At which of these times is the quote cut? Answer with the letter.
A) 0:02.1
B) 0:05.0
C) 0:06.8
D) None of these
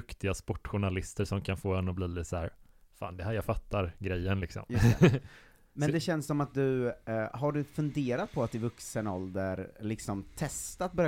D